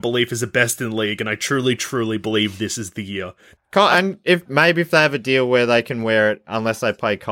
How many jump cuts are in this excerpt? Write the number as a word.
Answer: two